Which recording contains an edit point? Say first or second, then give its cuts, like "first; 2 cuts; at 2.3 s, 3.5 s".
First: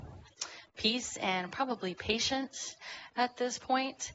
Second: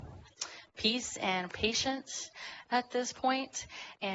second; 1 cut; at 1.5 s